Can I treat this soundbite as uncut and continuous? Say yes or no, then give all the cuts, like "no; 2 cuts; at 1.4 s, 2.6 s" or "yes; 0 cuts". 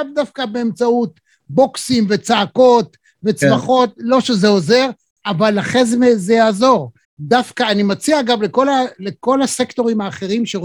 no; 1 cut; at 7.0 s